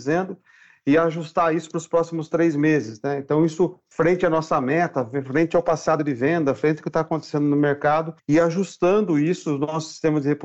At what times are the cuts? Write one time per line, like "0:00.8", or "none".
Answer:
none